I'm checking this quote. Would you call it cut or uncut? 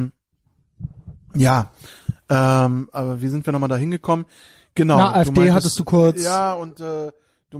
uncut